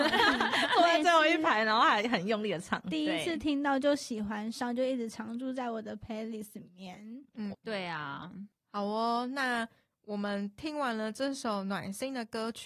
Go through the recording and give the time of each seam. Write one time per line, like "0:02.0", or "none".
0:07.5